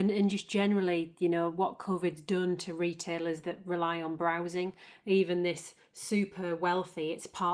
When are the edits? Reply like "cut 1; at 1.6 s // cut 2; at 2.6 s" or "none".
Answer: none